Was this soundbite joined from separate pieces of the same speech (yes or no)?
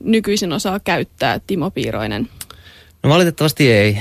yes